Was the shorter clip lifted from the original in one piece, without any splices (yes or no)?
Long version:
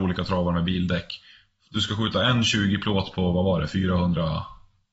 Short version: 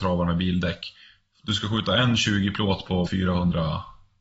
no